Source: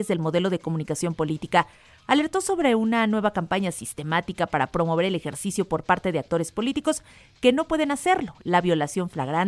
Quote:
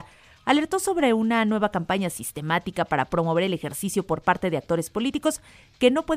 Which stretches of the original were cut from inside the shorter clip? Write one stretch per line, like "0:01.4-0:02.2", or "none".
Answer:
none

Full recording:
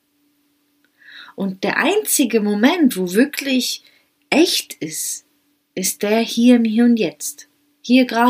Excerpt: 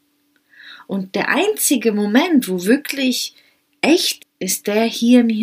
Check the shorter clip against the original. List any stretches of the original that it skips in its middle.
0:04.7-0:05.5

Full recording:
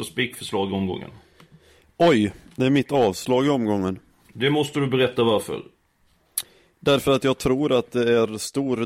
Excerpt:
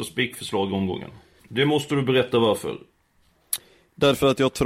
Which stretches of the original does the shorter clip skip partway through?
0:01.4-0:04.2

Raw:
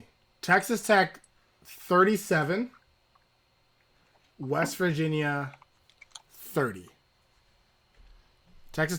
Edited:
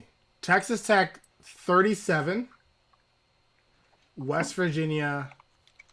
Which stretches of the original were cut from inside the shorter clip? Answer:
0:01.3-0:01.5

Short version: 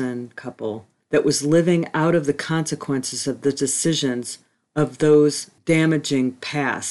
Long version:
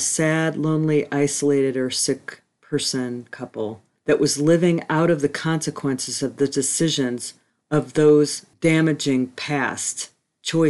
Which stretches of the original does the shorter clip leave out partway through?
none

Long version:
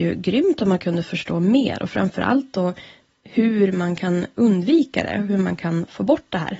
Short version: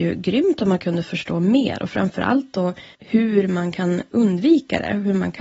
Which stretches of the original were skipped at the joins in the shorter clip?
0:02.9-0:03.2

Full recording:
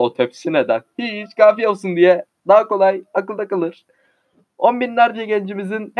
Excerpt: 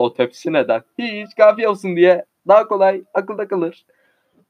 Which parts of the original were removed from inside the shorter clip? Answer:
none

